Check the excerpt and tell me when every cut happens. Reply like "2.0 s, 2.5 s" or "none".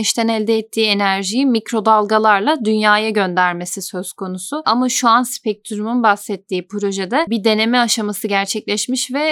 4.6 s